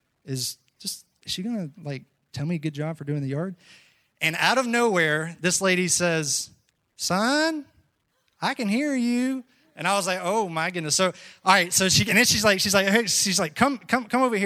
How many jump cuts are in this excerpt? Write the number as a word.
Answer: zero